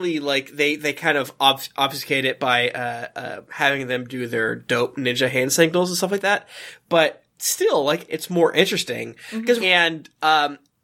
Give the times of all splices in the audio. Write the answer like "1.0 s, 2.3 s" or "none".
8.1 s, 9.6 s

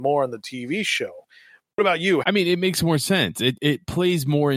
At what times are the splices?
2.2 s, 3.6 s

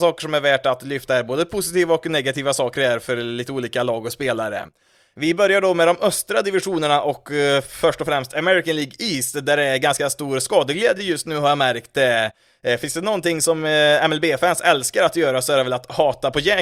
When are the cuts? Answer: none

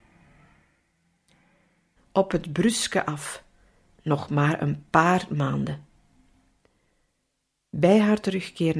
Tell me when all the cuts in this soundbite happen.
2.0 s

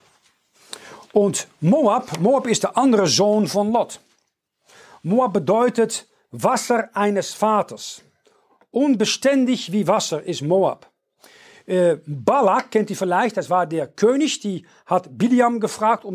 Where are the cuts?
none

